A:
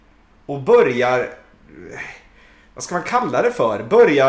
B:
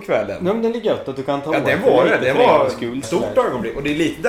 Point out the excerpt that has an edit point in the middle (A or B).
B